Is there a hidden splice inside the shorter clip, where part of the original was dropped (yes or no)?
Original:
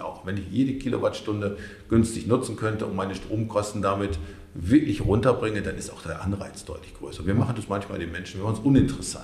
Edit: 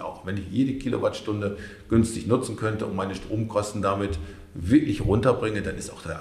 no